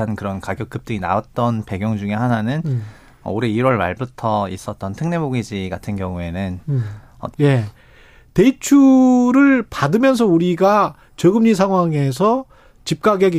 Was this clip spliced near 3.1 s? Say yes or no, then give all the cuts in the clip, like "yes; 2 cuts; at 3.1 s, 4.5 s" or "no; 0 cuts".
no; 1 cut; at 7.3 s